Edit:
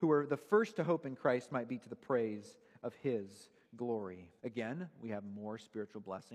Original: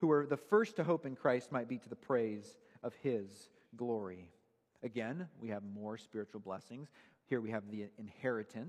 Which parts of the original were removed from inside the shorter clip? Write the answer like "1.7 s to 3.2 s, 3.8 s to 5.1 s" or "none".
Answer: 4.4 s to 4.8 s